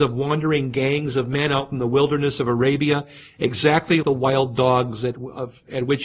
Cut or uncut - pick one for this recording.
cut